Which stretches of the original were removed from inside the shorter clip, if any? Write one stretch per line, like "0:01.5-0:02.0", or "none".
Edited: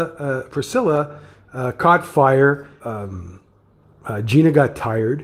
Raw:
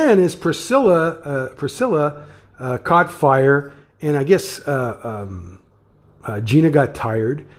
0:03.9-0:05.0